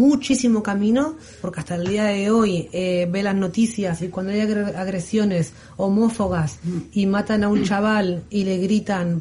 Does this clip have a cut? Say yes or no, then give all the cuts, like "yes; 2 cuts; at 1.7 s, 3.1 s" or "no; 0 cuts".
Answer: yes; 1 cut; at 1.4 s